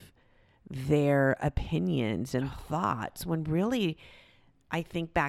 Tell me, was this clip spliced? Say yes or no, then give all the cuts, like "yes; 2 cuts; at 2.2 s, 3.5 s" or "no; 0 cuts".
no; 0 cuts